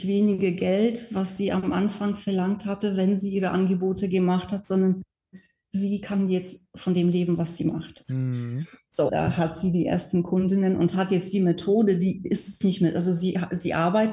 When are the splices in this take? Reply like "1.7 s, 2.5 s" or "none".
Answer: 8.0 s, 9.1 s, 12.6 s